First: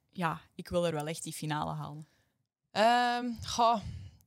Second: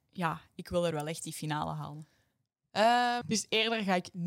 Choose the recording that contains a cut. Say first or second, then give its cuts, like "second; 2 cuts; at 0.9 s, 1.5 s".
second; 1 cut; at 3.2 s